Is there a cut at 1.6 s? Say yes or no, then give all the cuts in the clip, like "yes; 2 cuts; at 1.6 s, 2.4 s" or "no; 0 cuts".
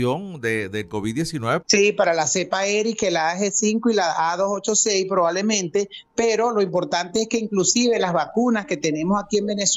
yes; 1 cut; at 1.6 s